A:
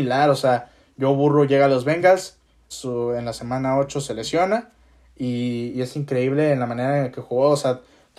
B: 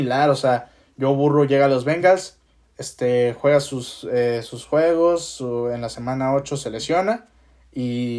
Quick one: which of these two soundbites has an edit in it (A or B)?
A